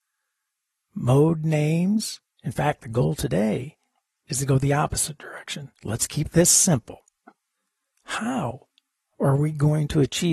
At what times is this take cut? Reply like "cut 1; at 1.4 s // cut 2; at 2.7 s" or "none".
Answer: cut 1; at 2.3 s // cut 2; at 5.8 s // cut 3; at 7.9 s